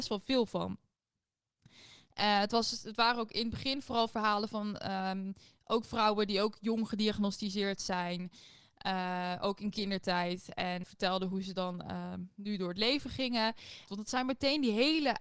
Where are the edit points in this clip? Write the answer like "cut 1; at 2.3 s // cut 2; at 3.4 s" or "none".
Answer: cut 1; at 10.8 s // cut 2; at 13.9 s